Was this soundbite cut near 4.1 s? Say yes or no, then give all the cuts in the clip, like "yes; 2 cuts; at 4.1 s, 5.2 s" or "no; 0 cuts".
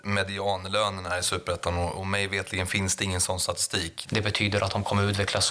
yes; 1 cut; at 4.1 s